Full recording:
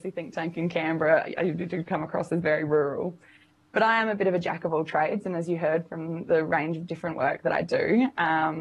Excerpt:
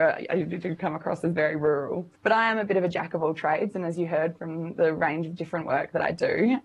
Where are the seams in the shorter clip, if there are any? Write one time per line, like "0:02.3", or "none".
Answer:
0:02.2